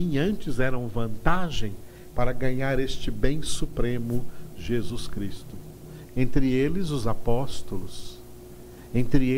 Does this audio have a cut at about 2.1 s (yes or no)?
yes